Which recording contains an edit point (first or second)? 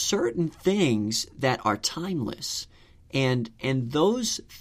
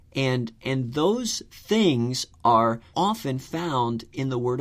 second